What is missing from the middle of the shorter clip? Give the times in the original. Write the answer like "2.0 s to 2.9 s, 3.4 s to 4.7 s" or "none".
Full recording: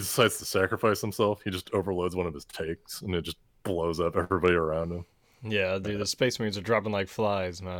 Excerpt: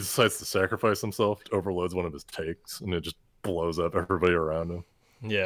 1.4 s to 1.6 s